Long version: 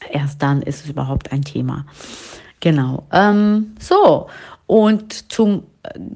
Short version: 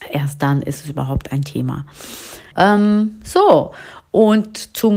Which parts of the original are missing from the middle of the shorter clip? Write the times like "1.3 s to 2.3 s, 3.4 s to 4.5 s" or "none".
2.5 s to 3.1 s